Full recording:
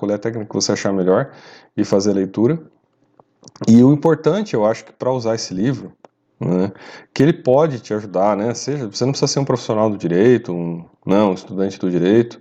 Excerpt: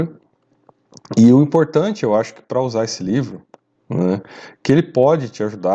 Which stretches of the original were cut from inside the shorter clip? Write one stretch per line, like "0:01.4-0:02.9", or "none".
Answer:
none